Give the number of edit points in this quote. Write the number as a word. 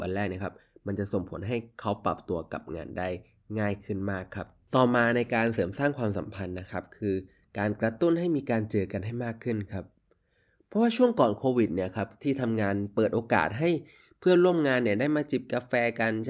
zero